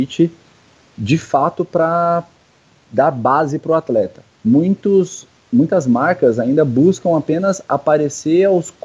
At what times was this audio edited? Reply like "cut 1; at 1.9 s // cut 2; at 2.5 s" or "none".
cut 1; at 4.3 s

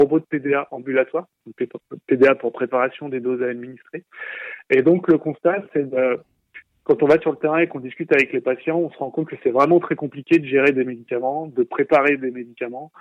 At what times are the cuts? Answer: none

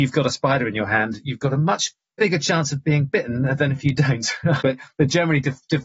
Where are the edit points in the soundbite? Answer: cut 1; at 4.6 s

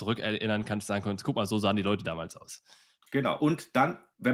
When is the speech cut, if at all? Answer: none

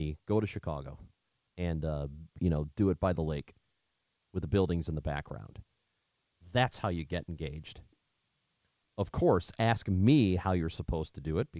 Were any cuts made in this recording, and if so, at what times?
none

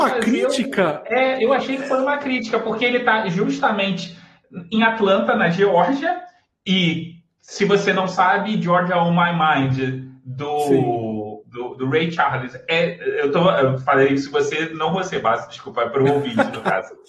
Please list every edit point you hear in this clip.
none

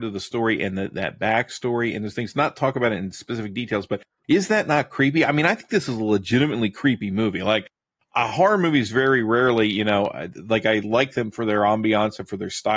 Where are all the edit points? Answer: none

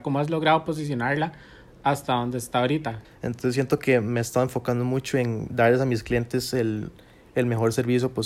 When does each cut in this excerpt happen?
cut 1; at 3.0 s

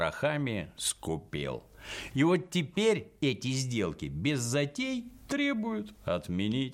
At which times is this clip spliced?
cut 1; at 2.1 s

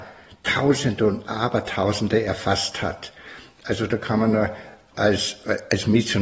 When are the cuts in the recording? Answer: none

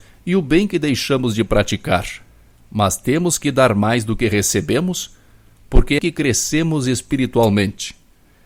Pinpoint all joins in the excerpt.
cut 1; at 6.0 s

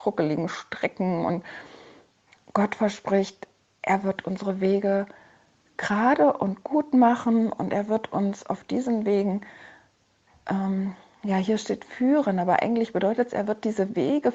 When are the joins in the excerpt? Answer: none

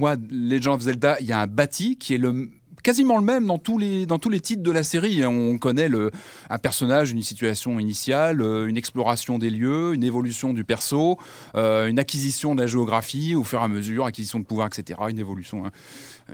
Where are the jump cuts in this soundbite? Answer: none

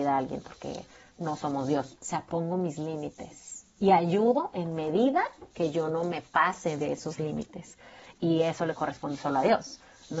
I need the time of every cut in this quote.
cut 1; at 2.0 s // cut 2; at 8.1 s

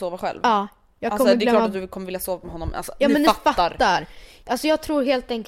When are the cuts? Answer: none

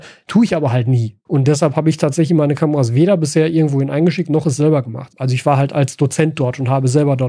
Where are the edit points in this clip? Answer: cut 1; at 1.3 s // cut 2; at 5.1 s

